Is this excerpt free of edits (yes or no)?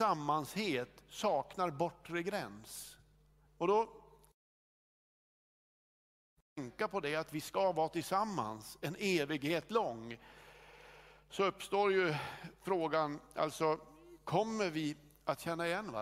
no